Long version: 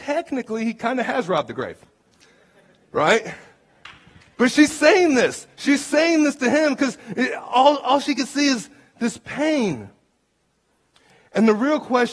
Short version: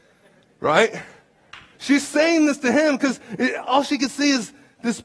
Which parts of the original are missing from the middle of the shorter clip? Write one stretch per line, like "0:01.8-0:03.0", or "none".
0:04.1-0:05.5
0:07.4-0:07.8